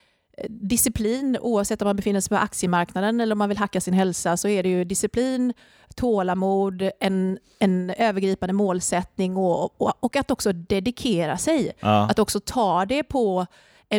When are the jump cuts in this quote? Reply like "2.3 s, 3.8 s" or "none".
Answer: none